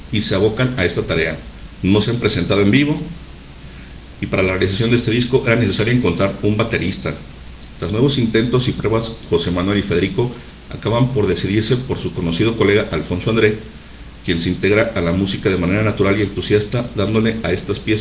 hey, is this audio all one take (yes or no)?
no